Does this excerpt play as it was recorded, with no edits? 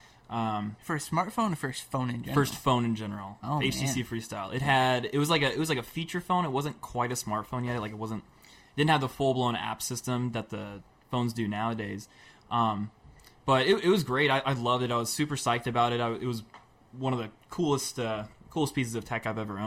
yes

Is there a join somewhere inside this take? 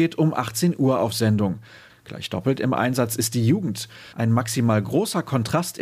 yes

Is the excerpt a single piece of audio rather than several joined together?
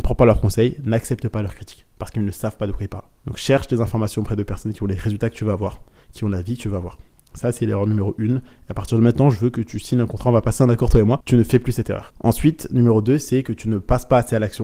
yes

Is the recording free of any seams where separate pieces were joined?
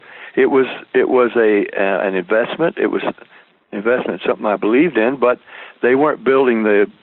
yes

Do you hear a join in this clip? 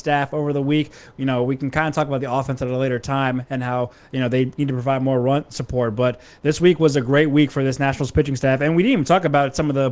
no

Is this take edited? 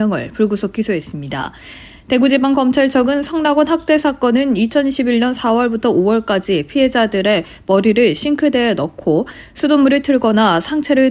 no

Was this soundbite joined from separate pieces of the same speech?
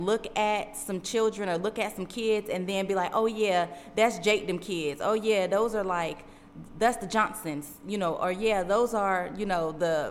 no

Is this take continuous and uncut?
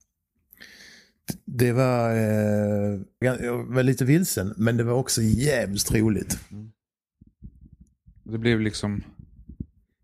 no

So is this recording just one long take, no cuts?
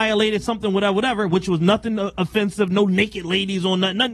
yes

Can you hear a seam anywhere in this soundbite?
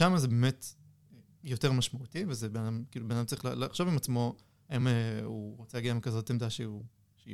no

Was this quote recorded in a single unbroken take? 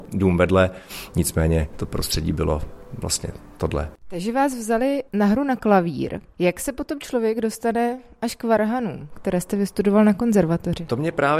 yes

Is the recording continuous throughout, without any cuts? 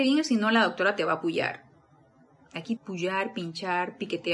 no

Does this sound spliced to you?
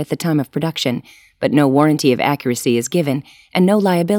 no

